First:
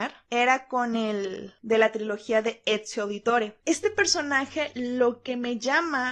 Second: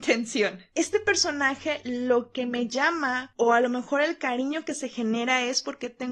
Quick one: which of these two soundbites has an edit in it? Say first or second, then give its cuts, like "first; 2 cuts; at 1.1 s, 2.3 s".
first; 1 cut; at 3.6 s